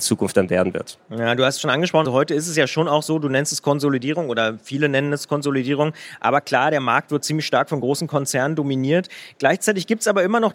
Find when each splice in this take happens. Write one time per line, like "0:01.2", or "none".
0:02.0